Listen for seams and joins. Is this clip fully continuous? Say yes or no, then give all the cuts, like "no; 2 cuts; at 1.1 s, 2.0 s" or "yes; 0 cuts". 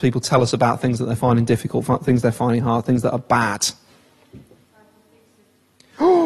yes; 0 cuts